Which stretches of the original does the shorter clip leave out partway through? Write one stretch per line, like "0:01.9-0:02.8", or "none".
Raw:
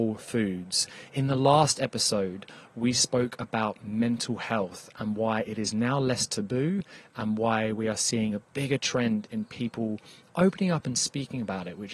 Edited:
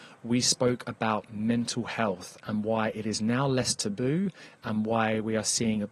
none